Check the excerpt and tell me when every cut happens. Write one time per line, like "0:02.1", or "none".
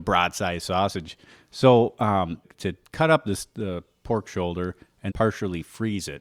0:02.4
0:05.1